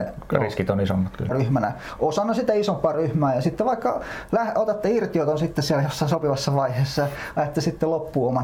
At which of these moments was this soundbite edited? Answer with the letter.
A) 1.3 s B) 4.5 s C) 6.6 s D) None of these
A